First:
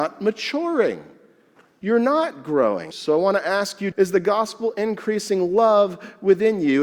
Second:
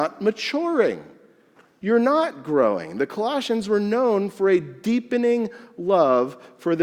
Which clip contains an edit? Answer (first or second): first